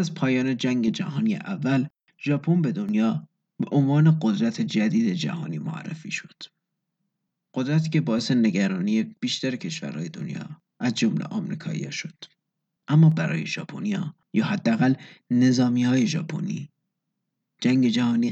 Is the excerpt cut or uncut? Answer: cut